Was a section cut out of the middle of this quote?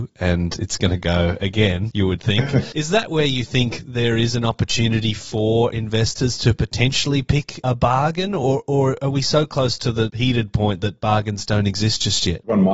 no; 0 cuts

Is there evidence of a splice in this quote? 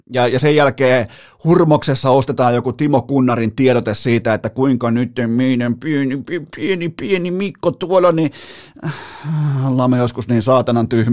no; 0 cuts

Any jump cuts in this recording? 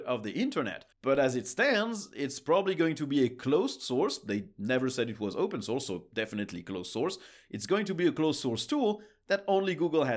yes; 1 cut; at 0.9 s

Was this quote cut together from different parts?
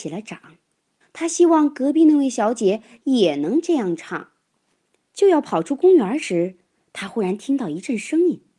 yes; 2 cuts; at 1.0 s, 5.0 s

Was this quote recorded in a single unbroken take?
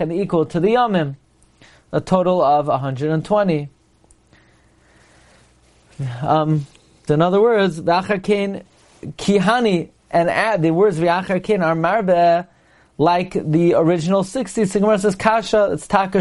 no; 1 cut; at 7.1 s

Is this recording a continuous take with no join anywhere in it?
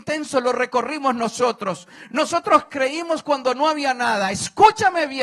yes; 0 cuts

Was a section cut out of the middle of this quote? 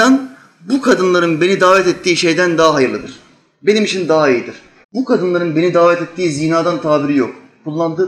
yes; 1 cut; at 4.8 s

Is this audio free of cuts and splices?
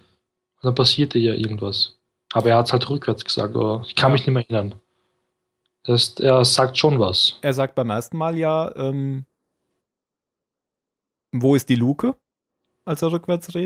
yes; 0 cuts

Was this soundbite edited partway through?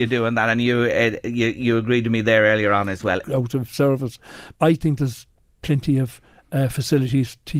yes; 2 cuts; at 3.2 s, 4.5 s

